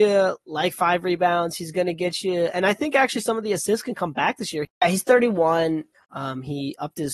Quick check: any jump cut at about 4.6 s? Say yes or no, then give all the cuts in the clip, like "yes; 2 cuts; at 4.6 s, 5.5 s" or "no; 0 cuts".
yes; 2 cuts; at 4.6 s, 5.9 s